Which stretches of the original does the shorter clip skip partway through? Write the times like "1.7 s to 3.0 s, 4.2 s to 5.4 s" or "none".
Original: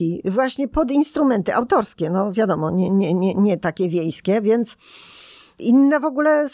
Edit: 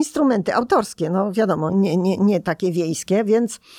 2.7 s to 2.9 s